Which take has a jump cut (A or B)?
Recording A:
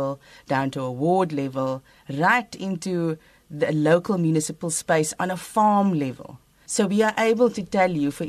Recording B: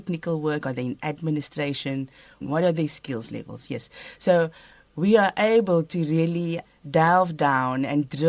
B